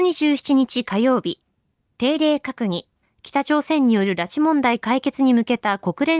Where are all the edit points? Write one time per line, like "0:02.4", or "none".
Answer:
0:03.0

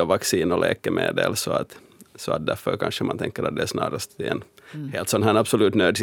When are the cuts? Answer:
none

